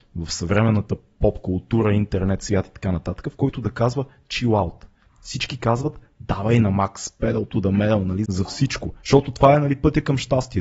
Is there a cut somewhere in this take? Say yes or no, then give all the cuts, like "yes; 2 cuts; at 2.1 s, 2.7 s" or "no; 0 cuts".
yes; 1 cut; at 8.3 s